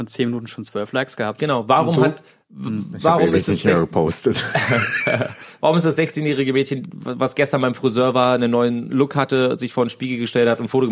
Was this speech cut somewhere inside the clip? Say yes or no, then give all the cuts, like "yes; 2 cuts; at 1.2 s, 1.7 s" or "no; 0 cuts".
no; 0 cuts